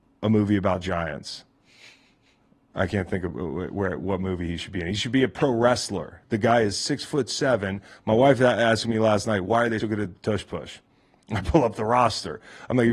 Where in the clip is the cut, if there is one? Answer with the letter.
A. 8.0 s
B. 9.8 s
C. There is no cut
B